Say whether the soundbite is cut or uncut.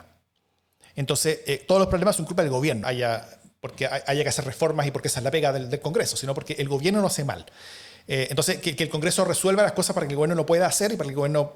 cut